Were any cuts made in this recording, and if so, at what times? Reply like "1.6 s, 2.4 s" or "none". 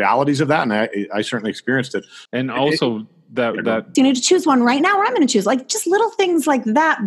2.3 s, 3.9 s